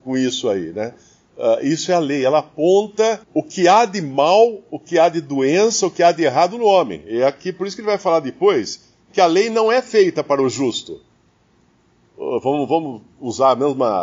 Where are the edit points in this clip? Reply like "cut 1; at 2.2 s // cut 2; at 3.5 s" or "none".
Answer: cut 1; at 3.2 s